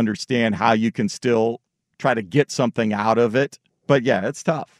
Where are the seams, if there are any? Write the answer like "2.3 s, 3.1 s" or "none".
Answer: 3.7 s